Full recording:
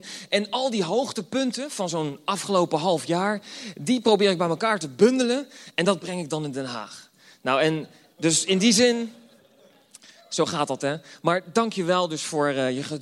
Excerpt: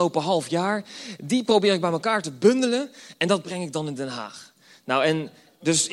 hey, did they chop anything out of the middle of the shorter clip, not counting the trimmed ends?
no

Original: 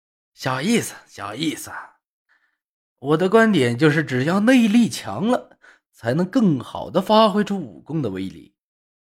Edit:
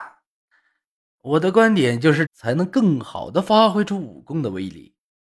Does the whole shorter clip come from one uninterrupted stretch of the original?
no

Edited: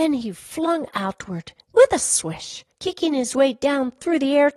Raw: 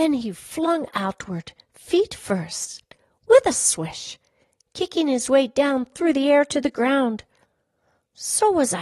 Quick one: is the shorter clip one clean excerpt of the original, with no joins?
no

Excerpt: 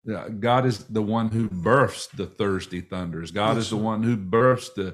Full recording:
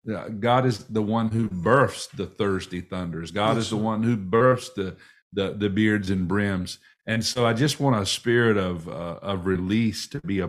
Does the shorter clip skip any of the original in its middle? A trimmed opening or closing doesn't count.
no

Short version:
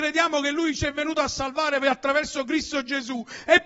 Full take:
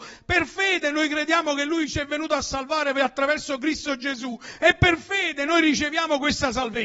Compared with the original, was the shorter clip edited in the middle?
no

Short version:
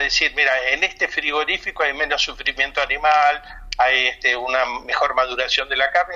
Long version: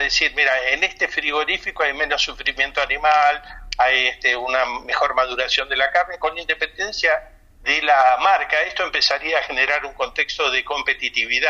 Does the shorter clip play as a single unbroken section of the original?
yes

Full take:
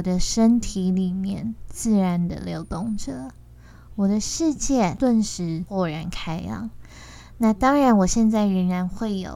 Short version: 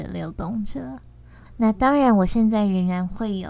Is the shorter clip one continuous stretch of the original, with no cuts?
no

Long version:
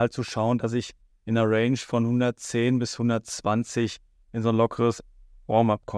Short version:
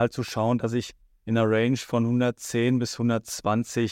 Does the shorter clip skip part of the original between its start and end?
no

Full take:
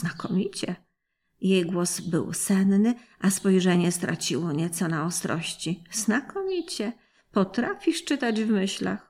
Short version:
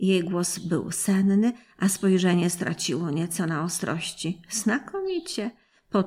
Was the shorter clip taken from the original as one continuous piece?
yes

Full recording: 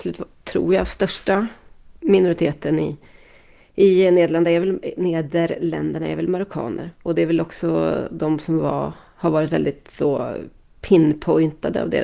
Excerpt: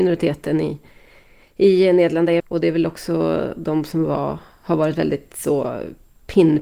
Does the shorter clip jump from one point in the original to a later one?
yes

